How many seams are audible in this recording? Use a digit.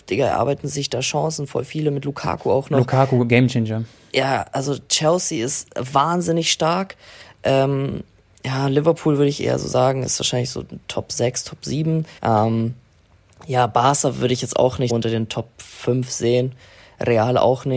2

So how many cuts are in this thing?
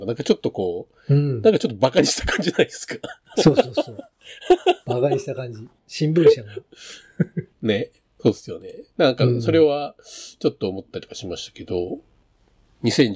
0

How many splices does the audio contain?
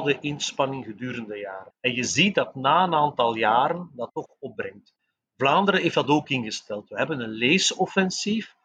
1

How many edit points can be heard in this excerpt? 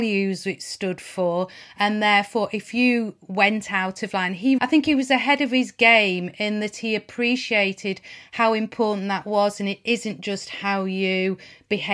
1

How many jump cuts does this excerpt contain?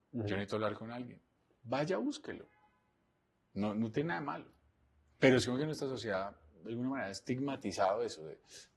0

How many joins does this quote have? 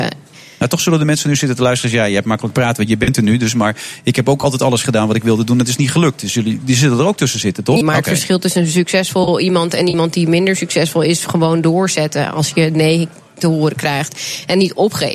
1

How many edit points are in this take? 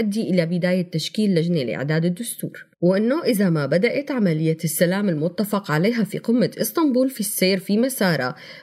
1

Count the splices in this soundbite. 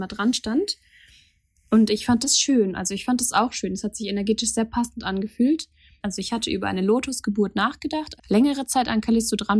2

